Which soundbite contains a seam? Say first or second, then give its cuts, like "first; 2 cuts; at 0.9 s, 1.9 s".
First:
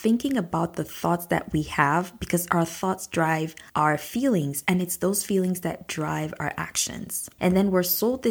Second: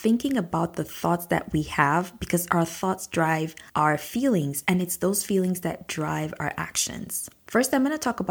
first; 1 cut; at 7.4 s